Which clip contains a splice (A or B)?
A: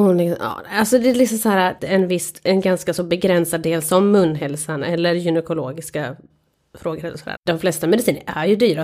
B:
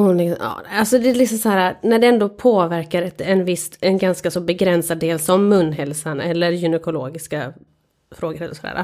A